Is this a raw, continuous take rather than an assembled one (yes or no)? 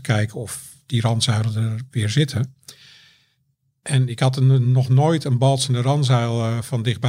yes